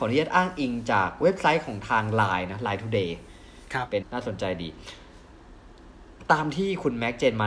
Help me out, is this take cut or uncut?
cut